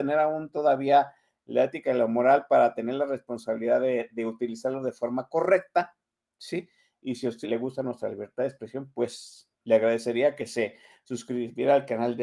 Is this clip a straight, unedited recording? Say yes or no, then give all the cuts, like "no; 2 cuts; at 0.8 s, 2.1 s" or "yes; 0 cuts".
no; 2 cuts; at 7.4 s, 9.6 s